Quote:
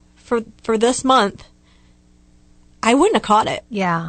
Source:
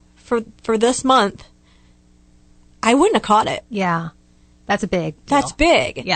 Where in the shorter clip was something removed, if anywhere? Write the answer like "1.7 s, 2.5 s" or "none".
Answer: none